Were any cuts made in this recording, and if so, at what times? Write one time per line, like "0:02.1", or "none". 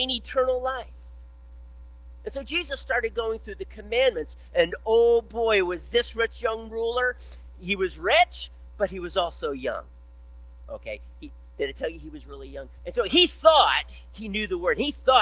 0:12.8